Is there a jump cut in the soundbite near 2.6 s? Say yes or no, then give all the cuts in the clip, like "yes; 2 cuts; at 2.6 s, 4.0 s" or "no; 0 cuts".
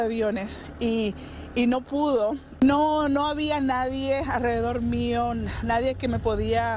yes; 1 cut; at 2.6 s